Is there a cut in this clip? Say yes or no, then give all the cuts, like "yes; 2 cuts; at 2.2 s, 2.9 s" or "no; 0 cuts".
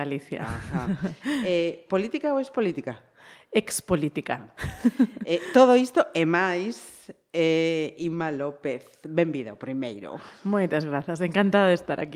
no; 0 cuts